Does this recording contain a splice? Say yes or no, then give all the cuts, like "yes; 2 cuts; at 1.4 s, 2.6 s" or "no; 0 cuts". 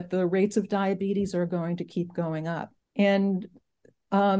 yes; 1 cut; at 2.8 s